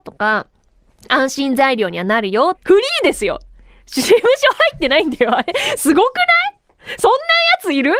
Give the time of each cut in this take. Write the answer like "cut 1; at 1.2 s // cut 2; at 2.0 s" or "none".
cut 1; at 2.5 s